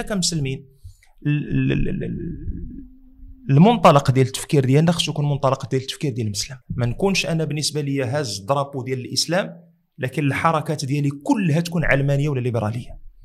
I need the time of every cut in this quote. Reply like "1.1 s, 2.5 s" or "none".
6.6 s